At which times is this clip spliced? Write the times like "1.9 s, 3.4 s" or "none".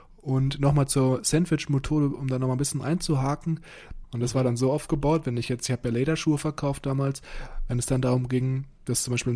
4.0 s